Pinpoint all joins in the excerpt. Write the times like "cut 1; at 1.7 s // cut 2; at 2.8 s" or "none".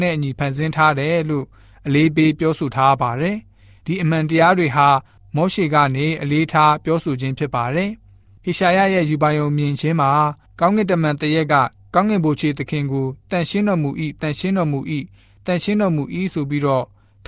none